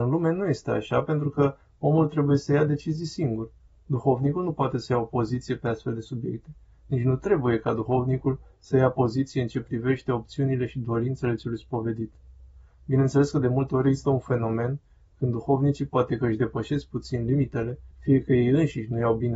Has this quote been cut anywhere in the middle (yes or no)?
yes